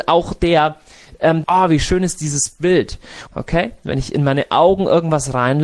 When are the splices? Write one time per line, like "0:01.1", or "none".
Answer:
0:01.4
0:03.3